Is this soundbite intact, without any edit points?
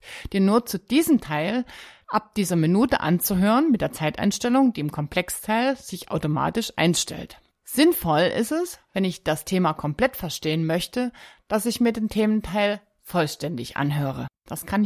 yes; 0 cuts

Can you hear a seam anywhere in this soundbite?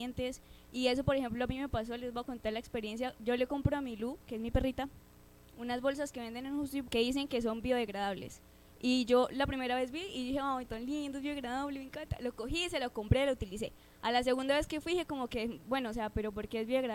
yes; 1 cut; at 6.8 s

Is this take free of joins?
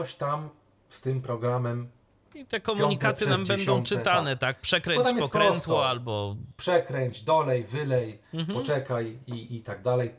yes; 0 cuts

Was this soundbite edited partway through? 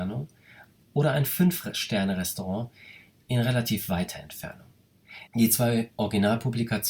yes; 1 cut; at 5.3 s

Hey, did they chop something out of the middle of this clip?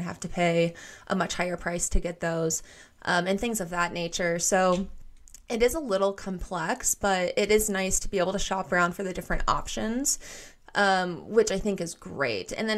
no; 0 cuts

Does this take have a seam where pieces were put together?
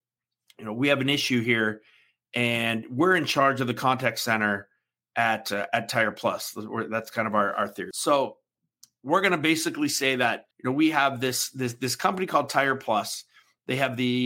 yes; 2 cuts; at 7.9 s, 10.5 s

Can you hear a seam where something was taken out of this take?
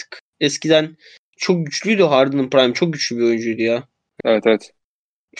yes; 1 cut; at 4.2 s

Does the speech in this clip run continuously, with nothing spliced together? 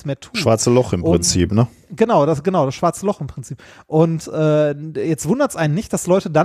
yes; 0 cuts

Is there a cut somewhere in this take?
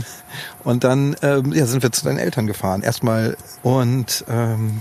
yes; 1 cut; at 3.6 s

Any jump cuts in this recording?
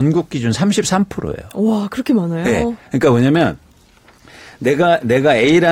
no; 0 cuts

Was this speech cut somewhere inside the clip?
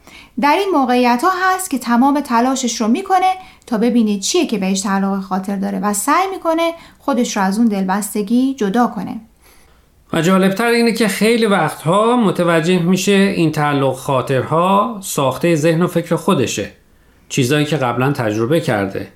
no; 0 cuts

